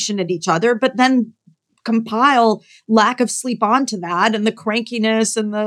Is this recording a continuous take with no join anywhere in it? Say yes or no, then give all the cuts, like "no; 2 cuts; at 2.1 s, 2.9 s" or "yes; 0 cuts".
yes; 0 cuts